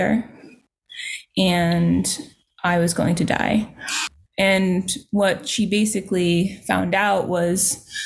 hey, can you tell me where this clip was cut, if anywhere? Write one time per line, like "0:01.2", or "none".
0:04.3